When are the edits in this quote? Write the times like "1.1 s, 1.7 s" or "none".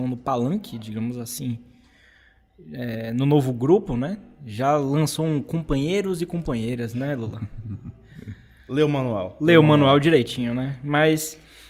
none